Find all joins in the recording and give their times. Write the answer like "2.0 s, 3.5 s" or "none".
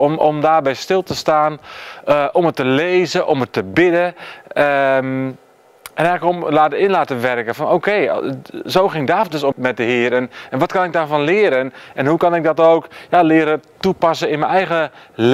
9.5 s